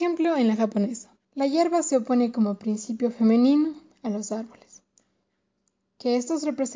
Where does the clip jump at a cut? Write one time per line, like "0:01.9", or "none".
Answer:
0:01.2